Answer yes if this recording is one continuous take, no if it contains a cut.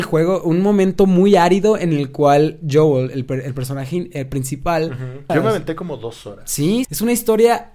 no